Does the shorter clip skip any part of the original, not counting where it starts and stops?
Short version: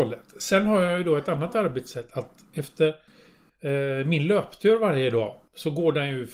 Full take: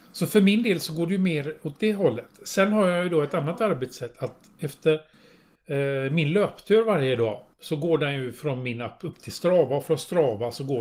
no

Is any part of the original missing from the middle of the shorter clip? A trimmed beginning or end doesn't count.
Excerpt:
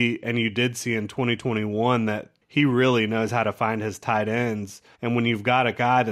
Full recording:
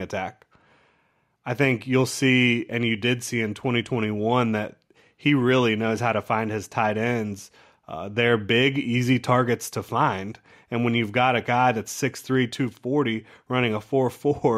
yes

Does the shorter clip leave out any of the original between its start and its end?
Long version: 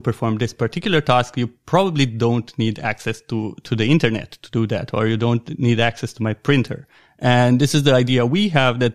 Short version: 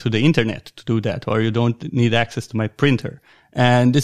no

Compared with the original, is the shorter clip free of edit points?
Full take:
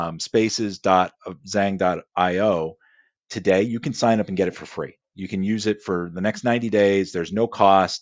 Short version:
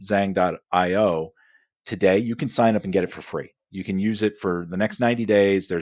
yes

